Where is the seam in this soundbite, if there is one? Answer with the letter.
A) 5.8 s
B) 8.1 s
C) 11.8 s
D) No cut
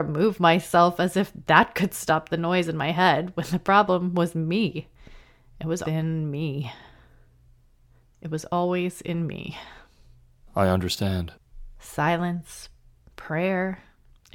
A